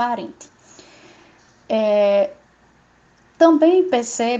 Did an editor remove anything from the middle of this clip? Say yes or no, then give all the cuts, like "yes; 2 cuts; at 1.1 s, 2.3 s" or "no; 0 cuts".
no; 0 cuts